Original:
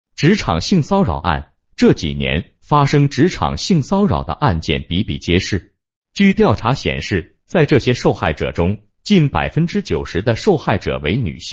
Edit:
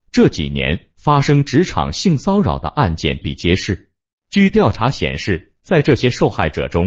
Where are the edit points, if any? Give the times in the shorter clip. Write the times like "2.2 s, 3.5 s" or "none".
3.2 s

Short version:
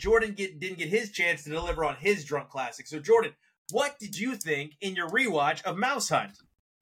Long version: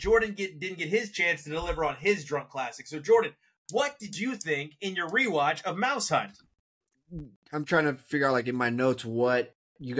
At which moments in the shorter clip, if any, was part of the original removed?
none

